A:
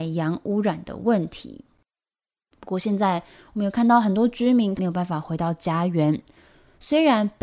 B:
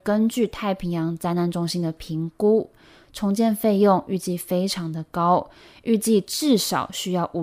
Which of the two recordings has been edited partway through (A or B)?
A